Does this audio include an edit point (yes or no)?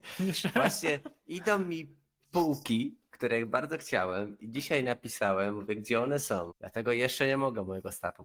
yes